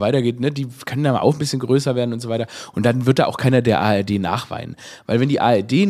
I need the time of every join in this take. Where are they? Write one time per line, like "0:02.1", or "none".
none